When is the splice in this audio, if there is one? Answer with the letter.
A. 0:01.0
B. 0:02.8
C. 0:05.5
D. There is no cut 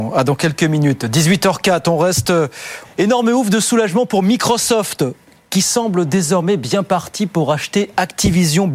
B